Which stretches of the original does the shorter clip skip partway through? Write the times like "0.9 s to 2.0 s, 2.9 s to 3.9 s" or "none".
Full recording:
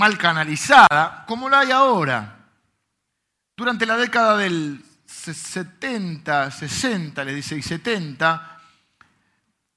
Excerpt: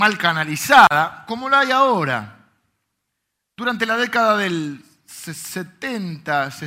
none